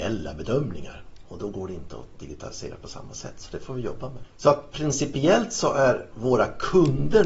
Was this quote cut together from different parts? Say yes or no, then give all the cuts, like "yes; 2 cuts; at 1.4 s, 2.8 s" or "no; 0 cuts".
no; 0 cuts